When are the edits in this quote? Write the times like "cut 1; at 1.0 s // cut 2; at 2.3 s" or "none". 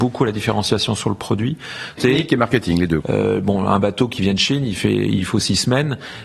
cut 1; at 2.0 s // cut 2; at 3.0 s